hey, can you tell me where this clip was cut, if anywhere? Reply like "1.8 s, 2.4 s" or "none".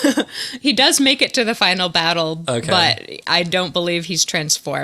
none